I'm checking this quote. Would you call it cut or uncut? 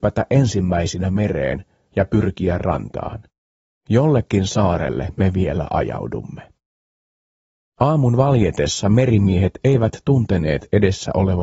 cut